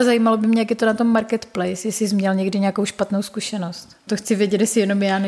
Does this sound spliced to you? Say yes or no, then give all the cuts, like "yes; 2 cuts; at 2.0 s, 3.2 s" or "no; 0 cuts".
yes; 1 cut; at 4.1 s